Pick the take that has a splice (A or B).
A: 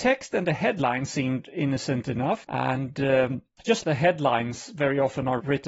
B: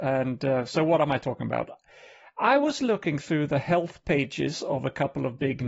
A